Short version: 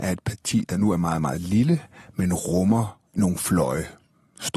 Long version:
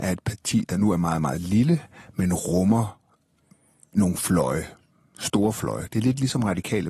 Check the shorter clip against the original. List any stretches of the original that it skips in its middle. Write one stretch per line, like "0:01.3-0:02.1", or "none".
0:03.1-0:03.9